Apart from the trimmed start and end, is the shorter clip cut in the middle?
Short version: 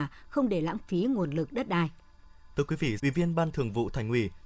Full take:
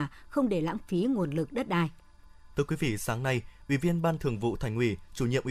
yes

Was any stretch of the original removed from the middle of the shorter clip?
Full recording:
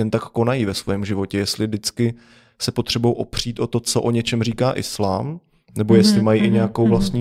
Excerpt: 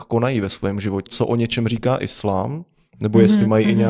yes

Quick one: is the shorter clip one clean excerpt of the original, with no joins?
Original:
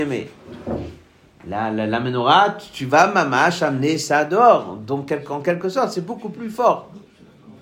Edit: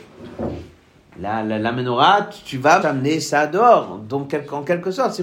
no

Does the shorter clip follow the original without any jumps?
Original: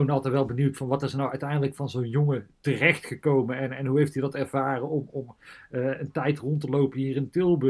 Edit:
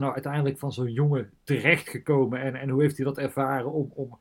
yes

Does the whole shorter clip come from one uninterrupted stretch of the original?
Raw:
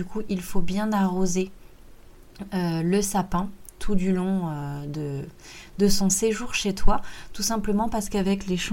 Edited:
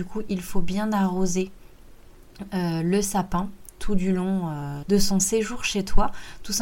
no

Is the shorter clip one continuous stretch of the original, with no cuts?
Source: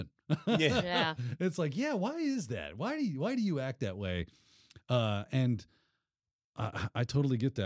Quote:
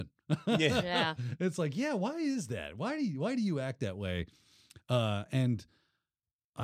yes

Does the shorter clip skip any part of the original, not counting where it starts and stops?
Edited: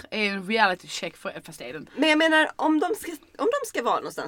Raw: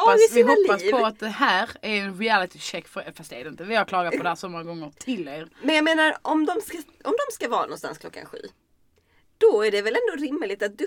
yes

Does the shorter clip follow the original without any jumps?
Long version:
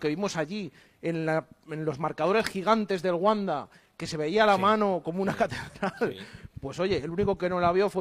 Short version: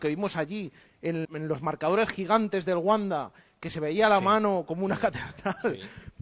no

